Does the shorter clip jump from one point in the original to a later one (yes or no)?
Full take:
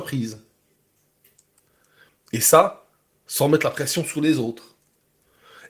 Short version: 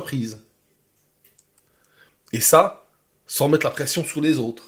no